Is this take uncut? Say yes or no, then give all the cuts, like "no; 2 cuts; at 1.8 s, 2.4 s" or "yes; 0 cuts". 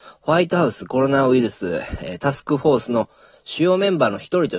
yes; 0 cuts